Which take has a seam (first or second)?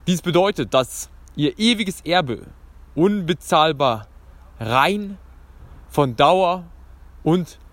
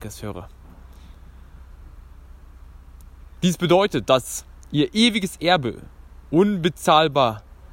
second